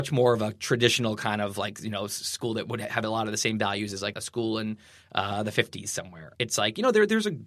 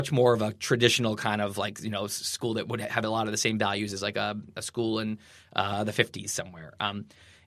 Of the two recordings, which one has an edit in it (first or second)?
first